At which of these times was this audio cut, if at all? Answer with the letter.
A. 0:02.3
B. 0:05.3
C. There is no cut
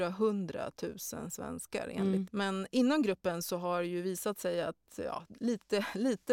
A